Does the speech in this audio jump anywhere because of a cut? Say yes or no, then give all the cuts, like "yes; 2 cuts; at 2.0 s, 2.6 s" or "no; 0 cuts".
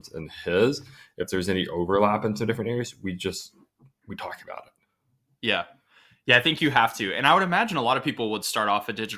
no; 0 cuts